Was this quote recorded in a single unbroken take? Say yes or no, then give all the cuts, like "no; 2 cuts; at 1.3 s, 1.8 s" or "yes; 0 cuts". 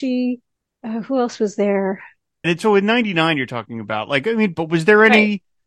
no; 2 cuts; at 2.4 s, 4.5 s